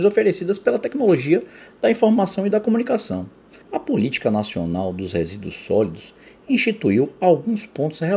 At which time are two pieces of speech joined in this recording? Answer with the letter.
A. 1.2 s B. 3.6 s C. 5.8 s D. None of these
B